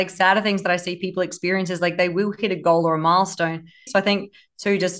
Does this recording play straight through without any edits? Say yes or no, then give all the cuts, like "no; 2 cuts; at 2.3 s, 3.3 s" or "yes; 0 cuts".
no; 1 cut; at 3.9 s